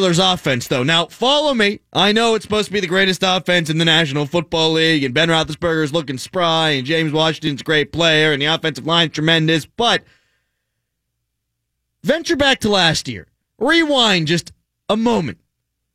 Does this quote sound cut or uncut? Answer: uncut